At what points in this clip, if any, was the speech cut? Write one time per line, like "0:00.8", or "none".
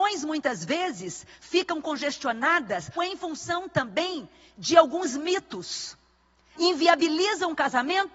0:03.0
0:06.5